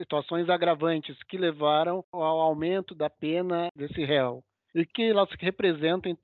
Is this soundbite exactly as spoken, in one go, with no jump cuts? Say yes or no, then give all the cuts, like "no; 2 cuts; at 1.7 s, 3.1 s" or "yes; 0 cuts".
no; 1 cut; at 4.9 s